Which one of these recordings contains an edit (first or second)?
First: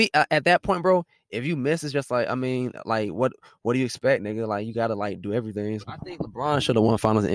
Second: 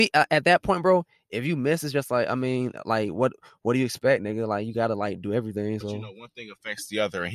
first